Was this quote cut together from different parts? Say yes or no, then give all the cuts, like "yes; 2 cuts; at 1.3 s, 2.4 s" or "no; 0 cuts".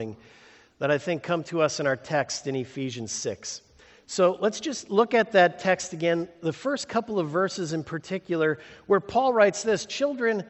no; 0 cuts